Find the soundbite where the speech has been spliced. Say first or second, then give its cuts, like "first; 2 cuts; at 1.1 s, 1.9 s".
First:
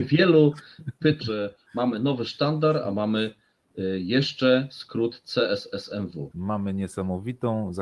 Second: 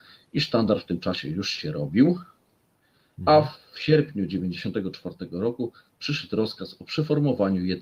first; 2 cuts; at 1.2 s, 6.3 s